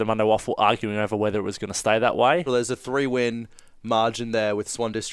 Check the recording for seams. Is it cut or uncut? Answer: cut